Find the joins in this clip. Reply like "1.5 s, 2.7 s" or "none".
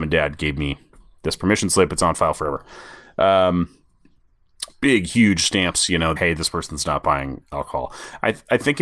4.7 s, 6.2 s

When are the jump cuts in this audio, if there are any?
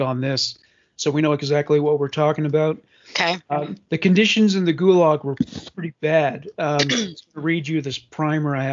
none

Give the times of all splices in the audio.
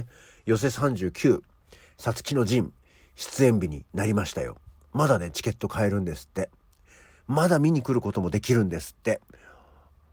none

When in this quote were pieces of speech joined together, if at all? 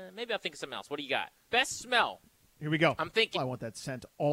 1.4 s, 3.3 s

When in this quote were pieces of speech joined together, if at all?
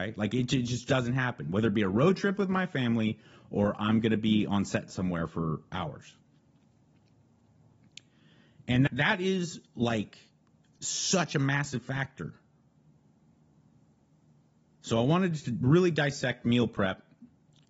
8.9 s

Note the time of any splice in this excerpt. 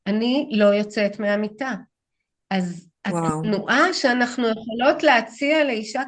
none

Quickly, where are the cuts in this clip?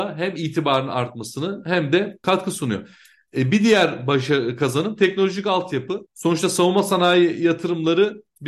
6.1 s

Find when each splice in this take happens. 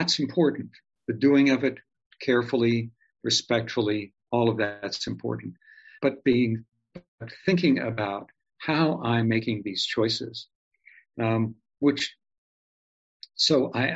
none

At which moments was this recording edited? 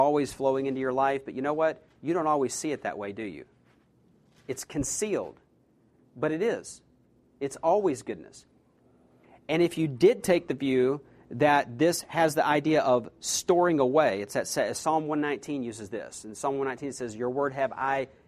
6.0 s

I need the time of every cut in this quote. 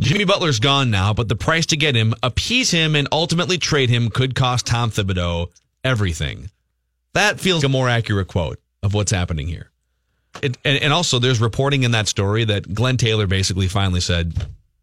7.6 s, 10.4 s

